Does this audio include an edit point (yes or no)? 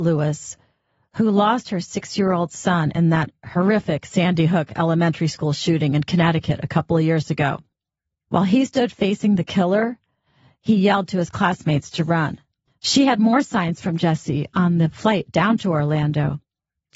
yes